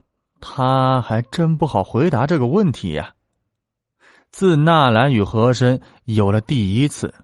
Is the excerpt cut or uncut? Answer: uncut